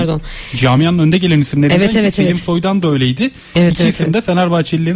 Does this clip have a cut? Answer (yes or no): no